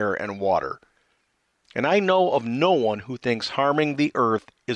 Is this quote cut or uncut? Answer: uncut